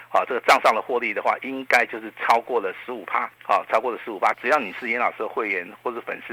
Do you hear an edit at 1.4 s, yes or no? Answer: no